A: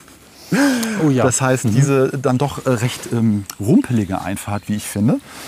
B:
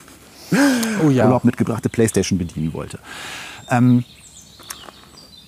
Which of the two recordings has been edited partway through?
B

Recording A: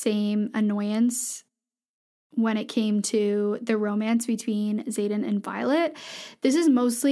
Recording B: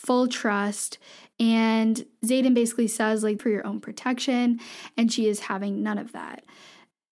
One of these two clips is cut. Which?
B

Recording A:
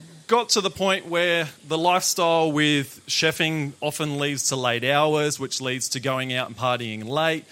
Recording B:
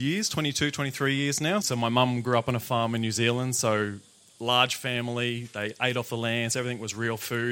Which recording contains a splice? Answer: B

